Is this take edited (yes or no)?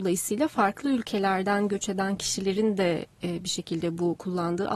no